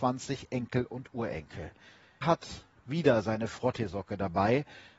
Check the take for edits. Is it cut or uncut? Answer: cut